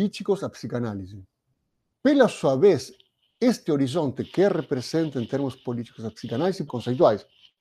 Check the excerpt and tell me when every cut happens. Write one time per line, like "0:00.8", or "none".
0:01.9
0:06.7